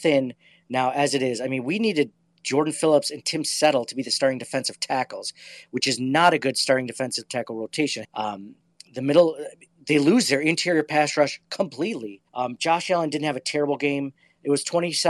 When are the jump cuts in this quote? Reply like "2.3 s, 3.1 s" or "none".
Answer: 8.0 s, 12.3 s